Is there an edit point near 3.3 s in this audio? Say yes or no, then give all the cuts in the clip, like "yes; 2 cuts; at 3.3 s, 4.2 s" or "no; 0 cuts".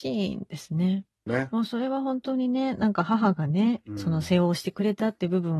no; 1 cut; at 1.3 s